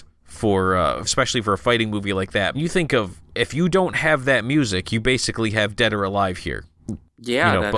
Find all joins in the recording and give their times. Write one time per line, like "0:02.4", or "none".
0:01.1
0:02.5